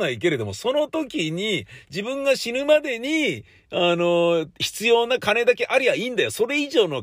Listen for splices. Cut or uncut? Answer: uncut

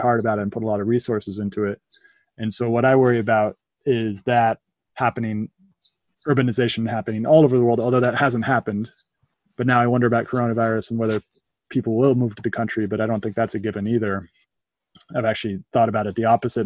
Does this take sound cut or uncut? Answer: uncut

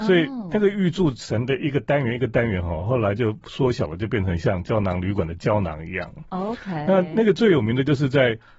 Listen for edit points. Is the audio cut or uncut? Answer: uncut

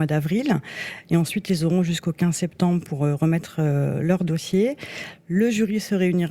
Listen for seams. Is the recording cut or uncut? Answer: uncut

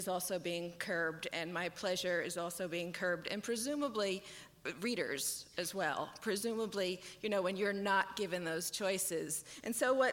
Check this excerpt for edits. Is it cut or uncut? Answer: uncut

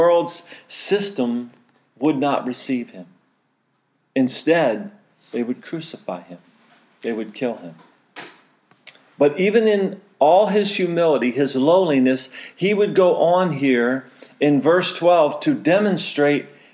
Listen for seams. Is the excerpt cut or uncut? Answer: uncut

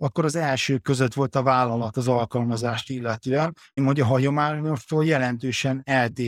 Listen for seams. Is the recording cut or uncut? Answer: cut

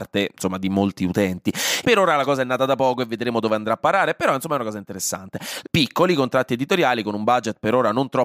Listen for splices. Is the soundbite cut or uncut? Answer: cut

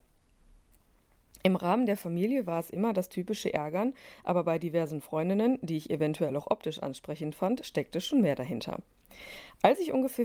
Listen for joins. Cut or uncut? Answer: uncut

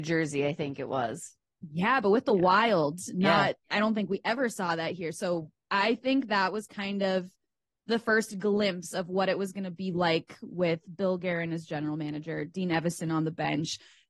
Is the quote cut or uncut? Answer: uncut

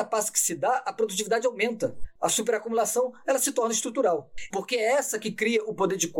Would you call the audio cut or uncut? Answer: cut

